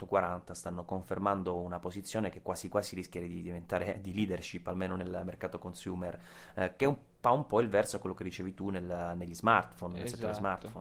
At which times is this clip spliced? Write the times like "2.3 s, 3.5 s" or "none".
none